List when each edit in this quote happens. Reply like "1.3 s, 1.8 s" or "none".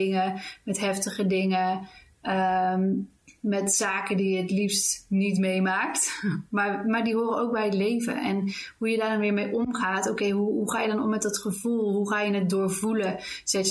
none